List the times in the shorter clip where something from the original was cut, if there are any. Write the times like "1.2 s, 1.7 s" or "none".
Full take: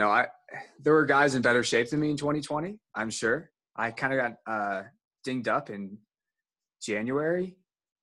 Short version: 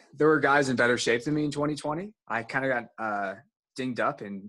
2.2 s